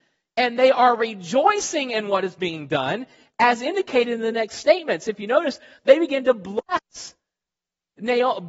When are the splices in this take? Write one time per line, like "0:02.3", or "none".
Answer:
none